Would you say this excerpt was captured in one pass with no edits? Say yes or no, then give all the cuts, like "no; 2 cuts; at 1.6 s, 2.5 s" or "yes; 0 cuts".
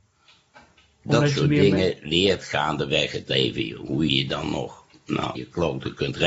no; 2 cuts; at 4.1 s, 5.4 s